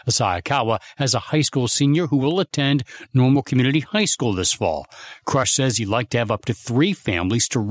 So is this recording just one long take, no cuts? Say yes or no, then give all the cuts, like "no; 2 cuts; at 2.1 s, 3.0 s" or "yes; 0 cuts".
yes; 0 cuts